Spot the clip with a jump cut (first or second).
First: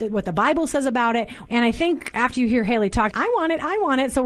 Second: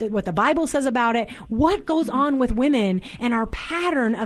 first